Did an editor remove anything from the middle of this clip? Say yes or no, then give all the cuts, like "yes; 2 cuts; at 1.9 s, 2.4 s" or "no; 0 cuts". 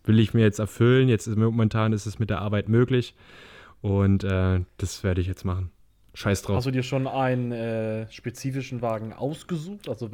no; 0 cuts